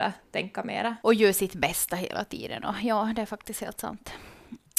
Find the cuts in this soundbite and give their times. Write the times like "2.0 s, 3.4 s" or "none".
1.0 s